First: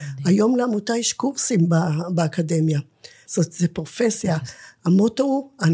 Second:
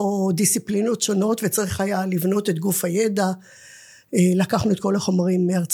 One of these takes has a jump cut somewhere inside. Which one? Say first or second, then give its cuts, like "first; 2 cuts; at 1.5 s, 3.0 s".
first; 1 cut; at 3.2 s